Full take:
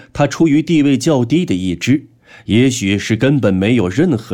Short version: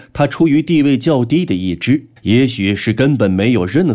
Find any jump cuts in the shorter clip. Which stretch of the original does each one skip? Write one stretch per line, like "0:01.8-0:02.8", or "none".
0:02.2-0:02.4